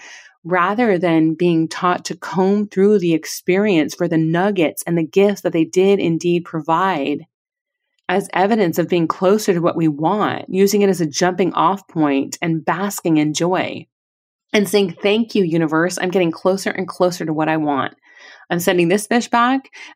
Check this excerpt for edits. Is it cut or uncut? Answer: uncut